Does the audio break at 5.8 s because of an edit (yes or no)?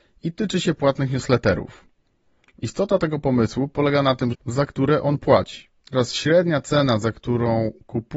yes